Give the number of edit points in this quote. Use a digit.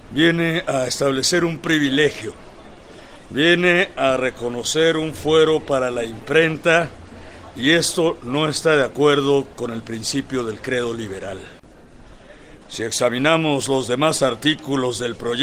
1